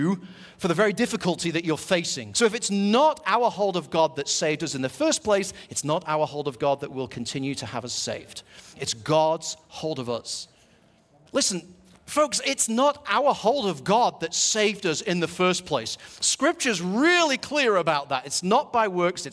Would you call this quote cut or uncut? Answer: cut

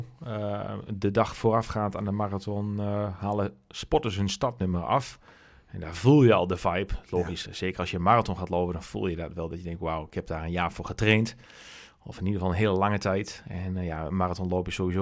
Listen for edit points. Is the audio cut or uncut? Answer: uncut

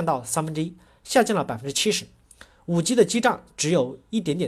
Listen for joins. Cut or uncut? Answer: uncut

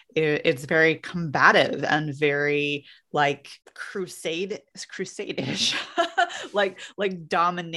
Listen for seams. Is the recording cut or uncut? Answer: uncut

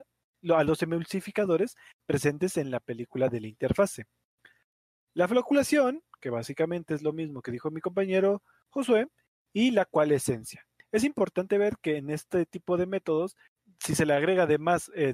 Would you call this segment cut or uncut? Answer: uncut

